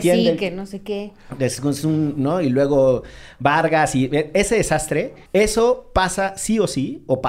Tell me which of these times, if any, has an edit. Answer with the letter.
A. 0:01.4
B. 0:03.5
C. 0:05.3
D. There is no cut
C